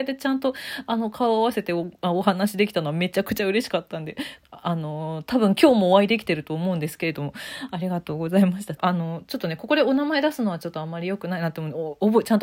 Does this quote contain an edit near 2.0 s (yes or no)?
no